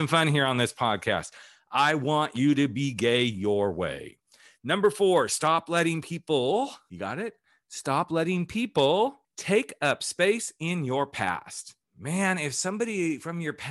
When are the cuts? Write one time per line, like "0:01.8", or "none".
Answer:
none